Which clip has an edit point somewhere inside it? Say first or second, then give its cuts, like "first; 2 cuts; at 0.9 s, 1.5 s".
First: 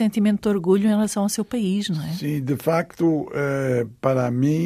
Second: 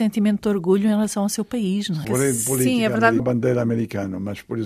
second; 2 cuts; at 2.0 s, 3.2 s